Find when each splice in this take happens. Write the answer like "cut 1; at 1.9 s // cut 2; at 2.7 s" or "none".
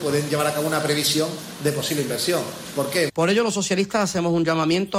cut 1; at 3.1 s